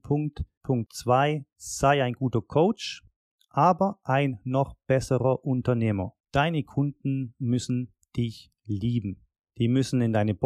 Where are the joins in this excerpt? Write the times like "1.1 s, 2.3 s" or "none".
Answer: none

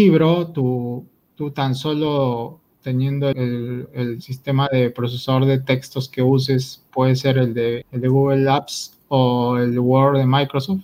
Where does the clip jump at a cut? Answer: 3.3 s, 7.8 s

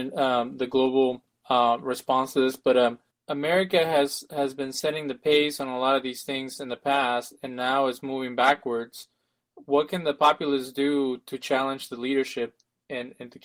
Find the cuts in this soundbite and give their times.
none

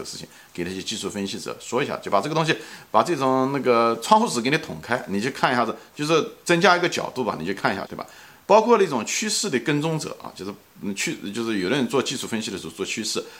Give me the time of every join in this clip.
7.9 s

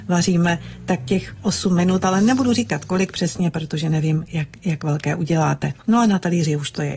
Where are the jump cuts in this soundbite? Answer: none

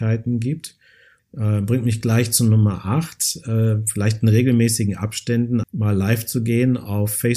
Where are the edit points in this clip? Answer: 1.2 s, 5.6 s

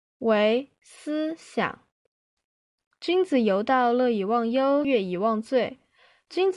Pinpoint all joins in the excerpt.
4.8 s

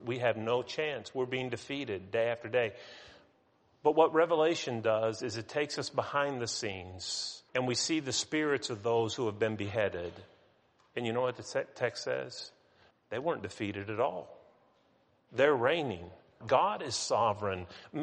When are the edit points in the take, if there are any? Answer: 7.5 s, 12.9 s, 16.4 s

